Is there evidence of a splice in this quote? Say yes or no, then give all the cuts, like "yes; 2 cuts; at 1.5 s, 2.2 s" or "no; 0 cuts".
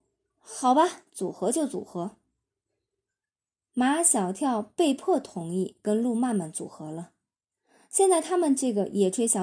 no; 0 cuts